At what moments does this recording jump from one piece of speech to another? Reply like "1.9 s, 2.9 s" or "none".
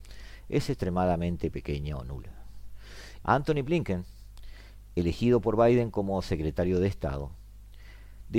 3.2 s